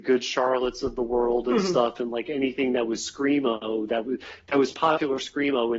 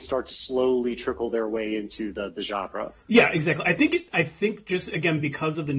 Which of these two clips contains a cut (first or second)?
second